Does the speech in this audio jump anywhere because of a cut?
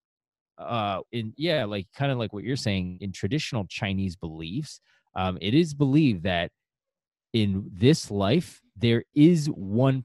yes; 2 cuts; at 1.1 s, 3.0 s

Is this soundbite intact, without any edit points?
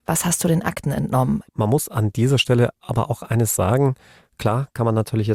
no; 1 cut; at 1.5 s

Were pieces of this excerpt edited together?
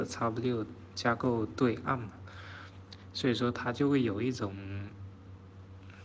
no; 0 cuts

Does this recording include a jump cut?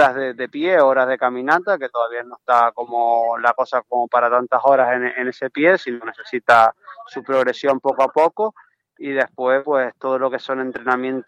no; 0 cuts

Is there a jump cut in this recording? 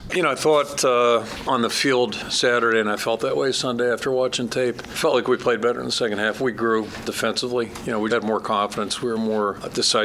yes; 1 cut; at 8.1 s

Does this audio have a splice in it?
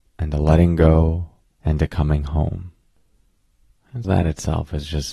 yes; 2 cuts; at 1.5 s, 4.0 s

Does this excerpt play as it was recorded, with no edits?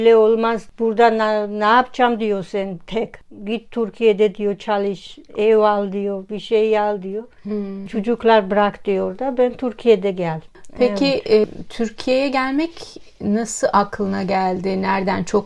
no; 1 cut; at 7.9 s

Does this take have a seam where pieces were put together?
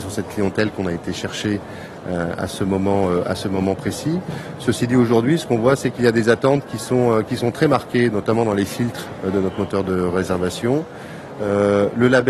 no; 0 cuts

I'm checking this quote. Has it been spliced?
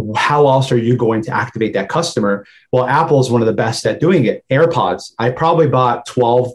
no; 0 cuts

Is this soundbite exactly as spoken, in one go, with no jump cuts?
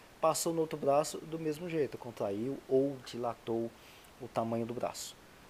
yes; 0 cuts

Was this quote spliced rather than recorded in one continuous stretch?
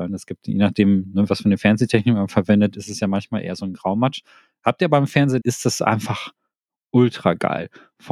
yes; 1 cut; at 5.4 s

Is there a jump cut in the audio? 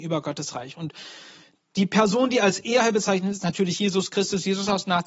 no; 0 cuts

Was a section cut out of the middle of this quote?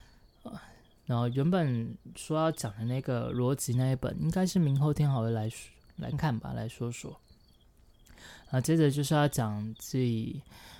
yes; 1 cut; at 6.1 s

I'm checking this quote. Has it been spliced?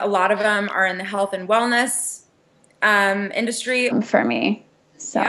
yes; 1 cut; at 3.9 s

